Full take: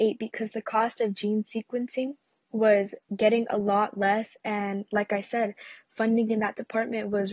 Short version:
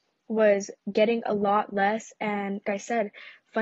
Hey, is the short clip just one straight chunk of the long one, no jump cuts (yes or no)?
no